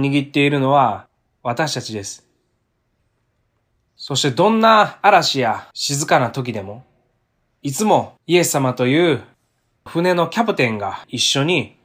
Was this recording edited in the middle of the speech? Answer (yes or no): yes